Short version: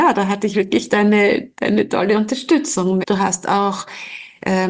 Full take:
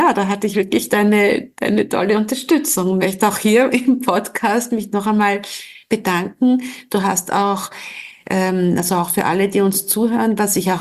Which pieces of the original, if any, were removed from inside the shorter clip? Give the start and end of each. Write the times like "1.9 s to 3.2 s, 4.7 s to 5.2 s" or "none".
3.0 s to 6.8 s